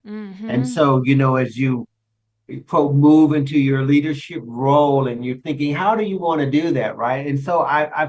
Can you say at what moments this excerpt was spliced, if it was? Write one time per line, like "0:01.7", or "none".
none